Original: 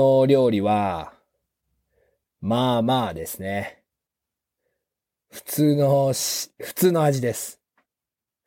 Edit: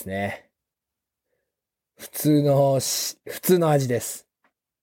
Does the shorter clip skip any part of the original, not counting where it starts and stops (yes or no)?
no